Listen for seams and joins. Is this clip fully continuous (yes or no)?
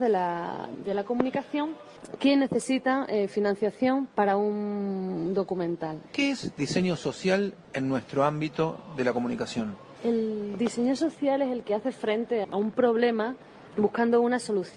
no